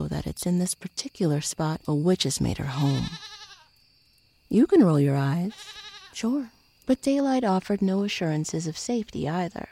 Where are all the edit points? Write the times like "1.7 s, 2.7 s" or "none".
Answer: 6.8 s